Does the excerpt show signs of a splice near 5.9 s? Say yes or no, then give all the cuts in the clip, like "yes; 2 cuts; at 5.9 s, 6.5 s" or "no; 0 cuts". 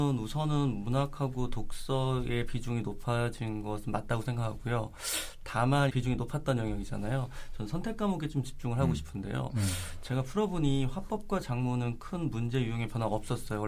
yes; 1 cut; at 5.9 s